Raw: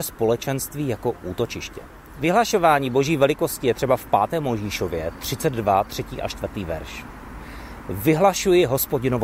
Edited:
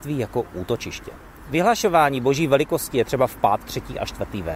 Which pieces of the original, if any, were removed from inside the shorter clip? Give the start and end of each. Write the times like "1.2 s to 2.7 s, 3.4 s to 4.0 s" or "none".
4.3 s to 5.8 s